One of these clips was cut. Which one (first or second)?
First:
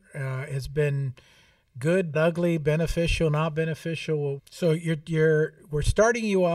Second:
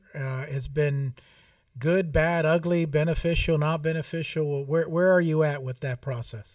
first